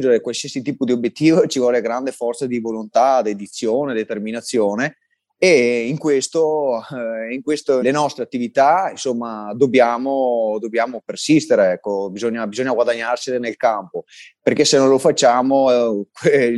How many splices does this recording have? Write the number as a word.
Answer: one